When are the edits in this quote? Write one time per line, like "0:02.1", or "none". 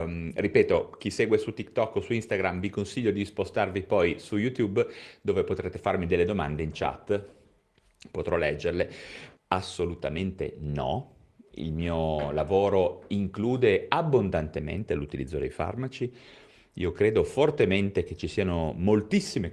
0:09.4